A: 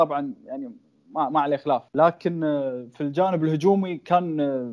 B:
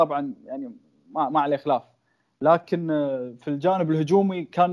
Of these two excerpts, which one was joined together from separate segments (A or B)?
A